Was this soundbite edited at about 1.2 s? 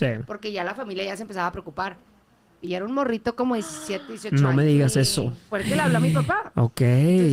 no; 2 cuts; at 2.6 s, 5.5 s

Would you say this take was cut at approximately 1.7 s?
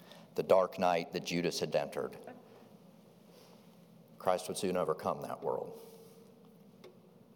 yes; 1 cut; at 1.7 s

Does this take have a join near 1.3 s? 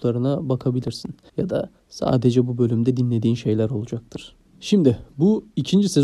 yes; 1 cut; at 1.3 s

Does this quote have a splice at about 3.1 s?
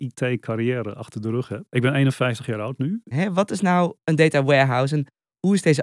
yes; 2 cuts; at 1.7 s, 3.1 s

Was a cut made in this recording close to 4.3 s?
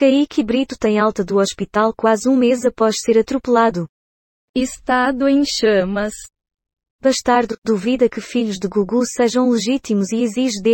no; 1 cut; at 6.9 s

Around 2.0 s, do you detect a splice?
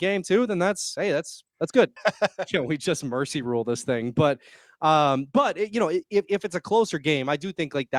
yes; 1 cut; at 2.0 s

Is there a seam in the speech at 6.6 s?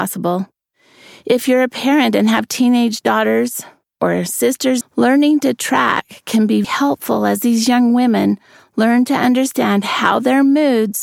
yes; 2 cuts; at 4.8 s, 6.6 s

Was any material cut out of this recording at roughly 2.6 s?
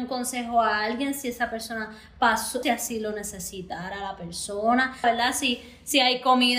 yes; 2 cuts; at 2.6 s, 5.0 s

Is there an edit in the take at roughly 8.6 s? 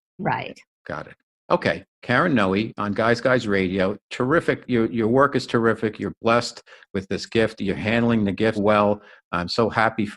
yes; 1 cut; at 8.6 s

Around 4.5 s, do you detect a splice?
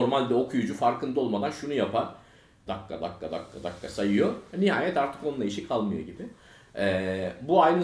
no; 1 cut; at 2.7 s

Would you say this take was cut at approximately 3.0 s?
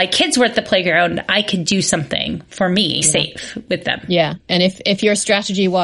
yes; 1 cut; at 3.0 s

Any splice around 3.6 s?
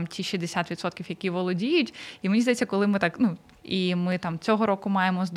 yes; 1 cut; at 3.6 s

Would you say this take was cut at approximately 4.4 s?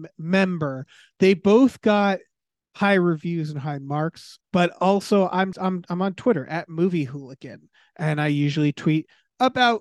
yes; 2 cuts; at 4.4 s, 5.5 s

